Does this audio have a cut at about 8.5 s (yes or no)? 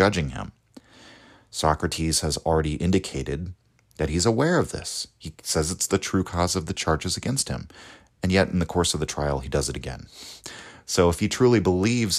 no